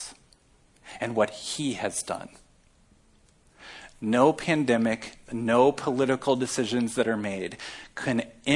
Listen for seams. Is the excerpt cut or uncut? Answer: cut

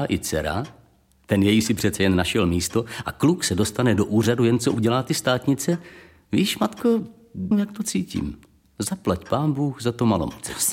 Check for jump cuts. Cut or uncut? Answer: cut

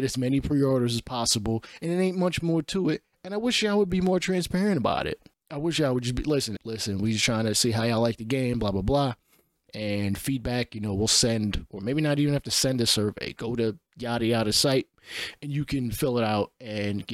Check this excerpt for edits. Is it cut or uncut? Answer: cut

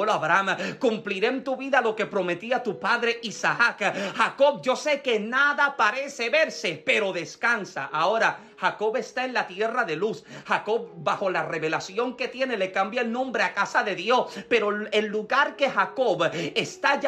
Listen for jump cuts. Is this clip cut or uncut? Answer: uncut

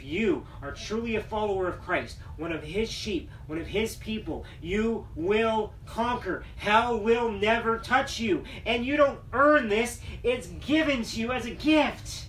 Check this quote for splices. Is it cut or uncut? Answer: uncut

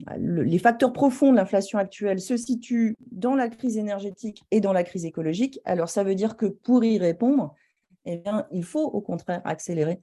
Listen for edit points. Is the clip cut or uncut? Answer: uncut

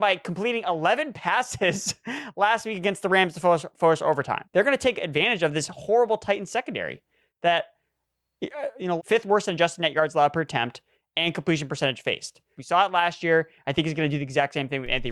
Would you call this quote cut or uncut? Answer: cut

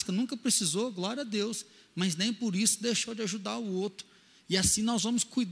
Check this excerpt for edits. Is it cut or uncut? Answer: uncut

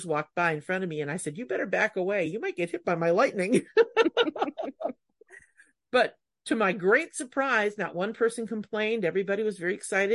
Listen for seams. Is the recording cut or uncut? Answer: uncut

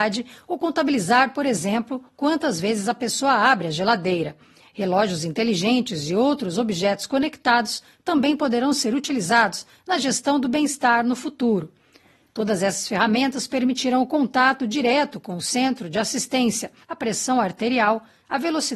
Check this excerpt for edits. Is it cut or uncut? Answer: cut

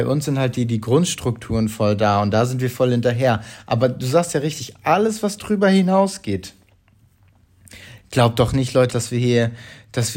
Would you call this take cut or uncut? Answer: cut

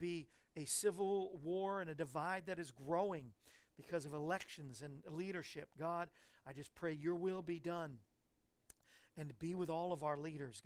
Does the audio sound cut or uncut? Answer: uncut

